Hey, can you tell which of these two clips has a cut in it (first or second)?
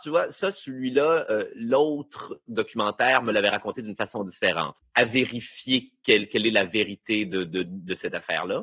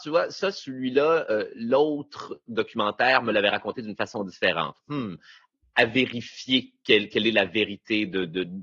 first